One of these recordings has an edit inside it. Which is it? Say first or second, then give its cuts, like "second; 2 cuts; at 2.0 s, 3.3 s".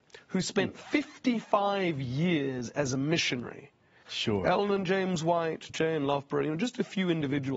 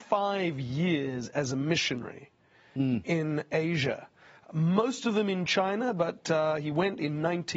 first; 2 cuts; at 4.0 s, 5.7 s